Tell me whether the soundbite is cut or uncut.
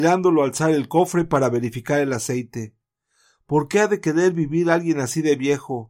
uncut